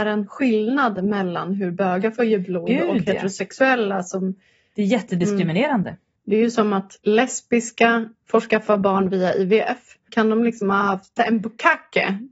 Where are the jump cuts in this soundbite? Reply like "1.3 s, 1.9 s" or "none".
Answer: 7.0 s, 10.1 s